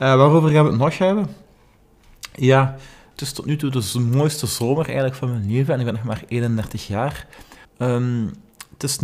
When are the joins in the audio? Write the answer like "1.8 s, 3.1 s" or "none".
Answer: 3.1 s, 7.7 s